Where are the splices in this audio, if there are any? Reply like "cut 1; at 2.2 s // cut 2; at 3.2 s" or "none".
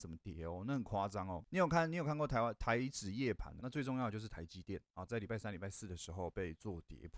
cut 1; at 3.6 s // cut 2; at 5.1 s